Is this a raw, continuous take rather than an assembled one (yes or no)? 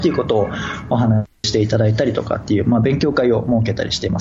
no